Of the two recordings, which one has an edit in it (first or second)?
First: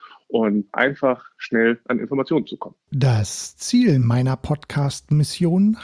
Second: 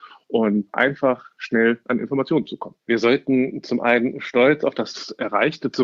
second